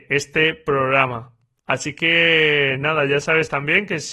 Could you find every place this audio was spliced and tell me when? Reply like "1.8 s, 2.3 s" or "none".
none